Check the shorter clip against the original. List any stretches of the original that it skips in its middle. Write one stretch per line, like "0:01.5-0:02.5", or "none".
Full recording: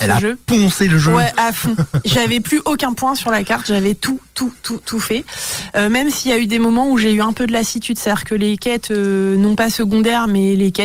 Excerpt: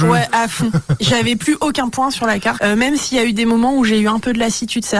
0:03.6-0:05.7